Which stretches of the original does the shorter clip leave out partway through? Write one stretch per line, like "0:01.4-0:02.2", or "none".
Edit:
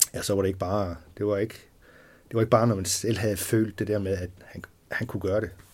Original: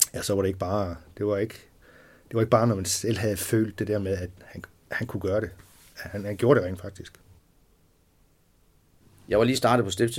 none

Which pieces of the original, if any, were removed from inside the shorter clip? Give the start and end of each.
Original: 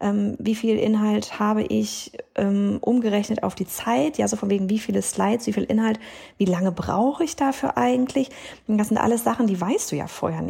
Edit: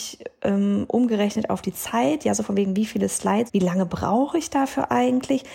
0:05.4-0:06.3

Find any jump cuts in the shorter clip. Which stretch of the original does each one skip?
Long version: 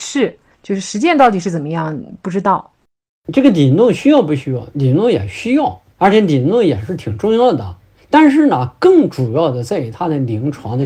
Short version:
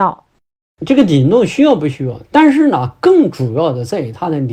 0:04.7-0:08.0

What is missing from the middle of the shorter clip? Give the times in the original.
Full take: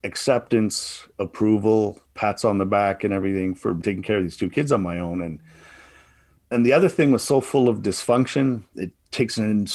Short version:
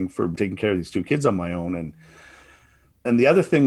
none

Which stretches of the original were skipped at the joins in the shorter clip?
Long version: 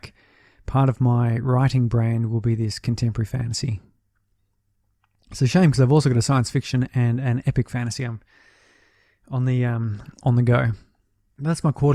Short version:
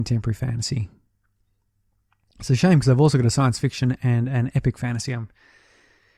none

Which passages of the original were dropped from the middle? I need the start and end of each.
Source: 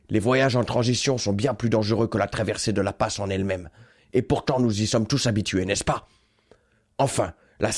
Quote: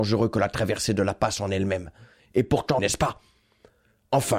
0:04.6-0:05.7

